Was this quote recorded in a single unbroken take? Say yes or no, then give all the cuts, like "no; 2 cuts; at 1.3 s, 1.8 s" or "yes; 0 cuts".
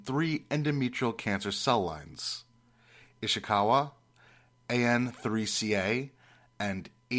yes; 0 cuts